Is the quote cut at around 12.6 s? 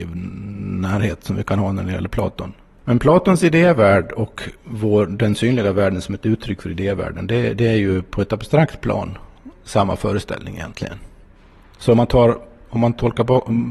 no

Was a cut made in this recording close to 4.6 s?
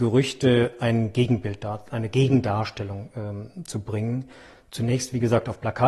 no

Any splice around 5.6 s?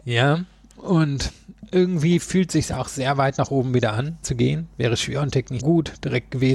yes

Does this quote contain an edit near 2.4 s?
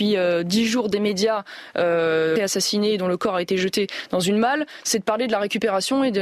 yes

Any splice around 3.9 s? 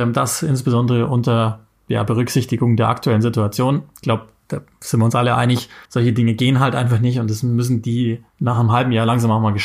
no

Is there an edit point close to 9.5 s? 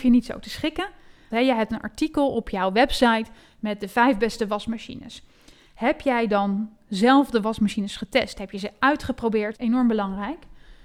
yes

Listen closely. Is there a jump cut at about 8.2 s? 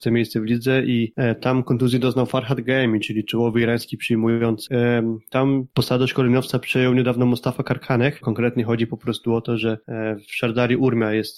yes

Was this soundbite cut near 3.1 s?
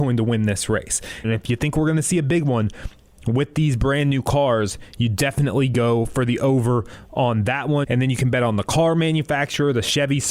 no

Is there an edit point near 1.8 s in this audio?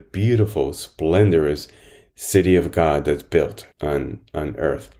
no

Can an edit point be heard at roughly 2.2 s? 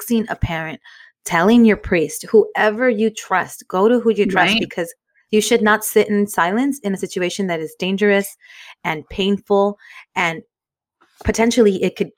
no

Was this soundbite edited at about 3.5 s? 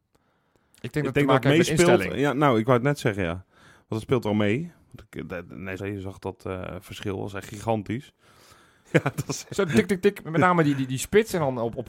no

